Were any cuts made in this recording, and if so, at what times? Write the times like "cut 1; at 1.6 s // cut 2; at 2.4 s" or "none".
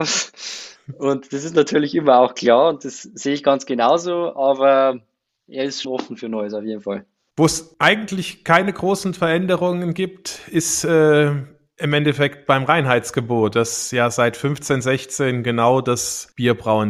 cut 1; at 5.8 s